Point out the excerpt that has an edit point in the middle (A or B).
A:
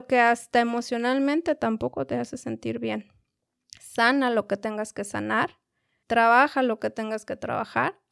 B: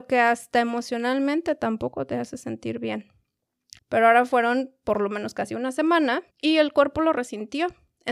B